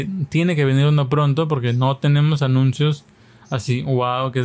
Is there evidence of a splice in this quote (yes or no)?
no